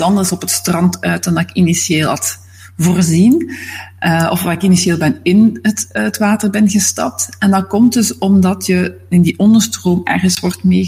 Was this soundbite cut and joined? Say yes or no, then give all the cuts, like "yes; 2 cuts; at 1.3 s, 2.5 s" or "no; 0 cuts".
no; 0 cuts